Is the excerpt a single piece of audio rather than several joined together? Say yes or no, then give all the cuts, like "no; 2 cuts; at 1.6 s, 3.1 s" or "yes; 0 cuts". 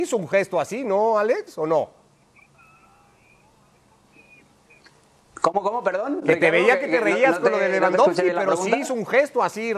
yes; 0 cuts